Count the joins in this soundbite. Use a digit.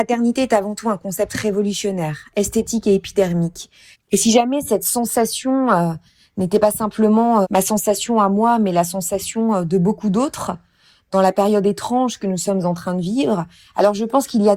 2